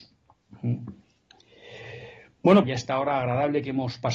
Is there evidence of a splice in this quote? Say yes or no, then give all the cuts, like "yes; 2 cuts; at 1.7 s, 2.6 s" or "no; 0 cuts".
yes; 1 cut; at 2.6 s